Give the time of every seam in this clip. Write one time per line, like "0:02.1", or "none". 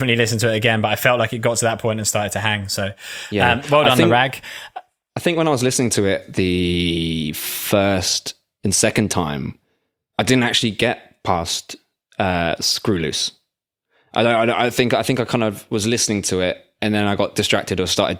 none